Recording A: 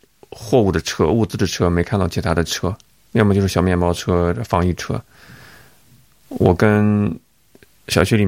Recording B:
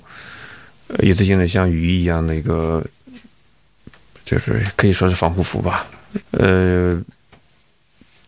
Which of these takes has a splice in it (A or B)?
B